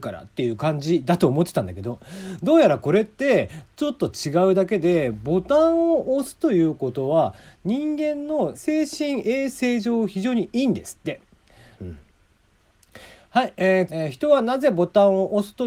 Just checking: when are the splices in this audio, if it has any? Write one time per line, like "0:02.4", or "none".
0:08.5
0:11.7
0:13.9